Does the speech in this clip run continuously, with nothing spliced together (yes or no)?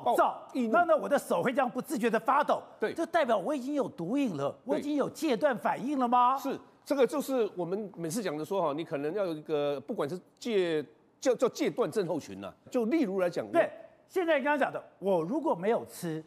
no